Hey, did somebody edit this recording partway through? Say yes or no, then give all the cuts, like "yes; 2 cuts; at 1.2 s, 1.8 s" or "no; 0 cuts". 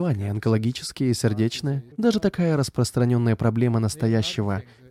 yes; 1 cut; at 1.9 s